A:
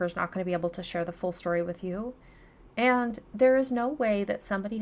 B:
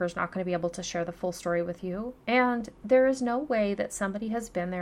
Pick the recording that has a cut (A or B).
B